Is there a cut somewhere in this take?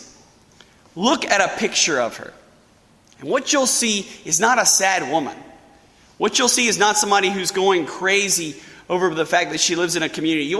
no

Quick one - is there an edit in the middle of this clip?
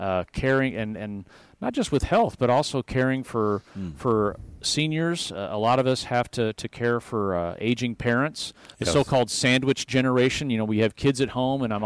no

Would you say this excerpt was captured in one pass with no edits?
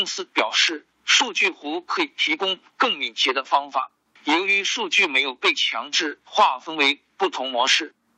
yes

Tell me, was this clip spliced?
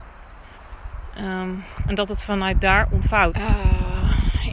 yes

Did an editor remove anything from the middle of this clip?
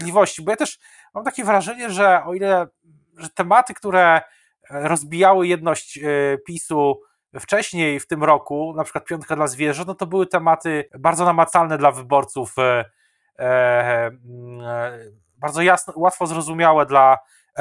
yes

